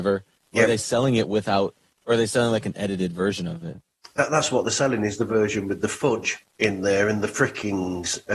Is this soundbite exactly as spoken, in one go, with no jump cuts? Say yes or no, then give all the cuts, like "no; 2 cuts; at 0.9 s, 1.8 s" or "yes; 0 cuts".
yes; 0 cuts